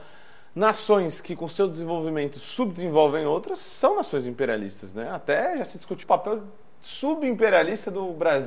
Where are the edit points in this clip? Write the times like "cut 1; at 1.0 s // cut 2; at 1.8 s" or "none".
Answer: cut 1; at 6.0 s